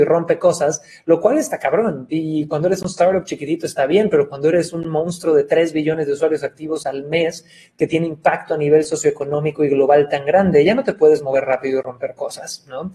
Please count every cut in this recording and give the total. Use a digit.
0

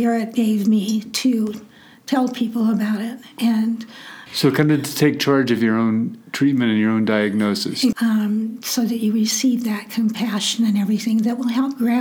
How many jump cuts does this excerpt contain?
2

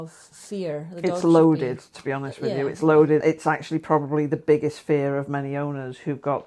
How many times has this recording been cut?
1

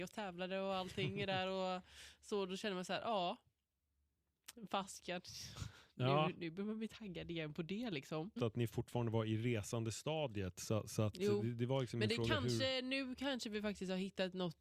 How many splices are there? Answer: 1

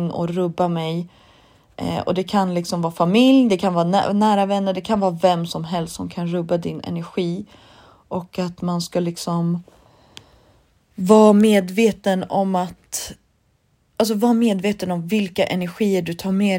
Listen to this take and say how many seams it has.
1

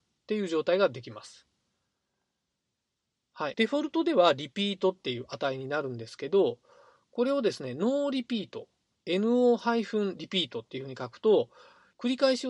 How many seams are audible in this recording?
1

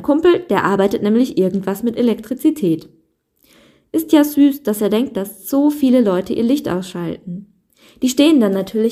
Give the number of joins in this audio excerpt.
0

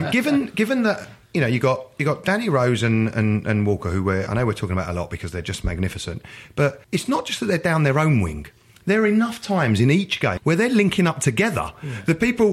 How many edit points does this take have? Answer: 2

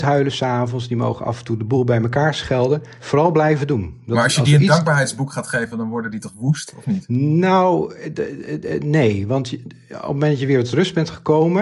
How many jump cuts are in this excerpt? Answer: 1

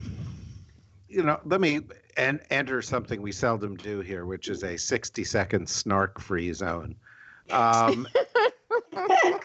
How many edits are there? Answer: 1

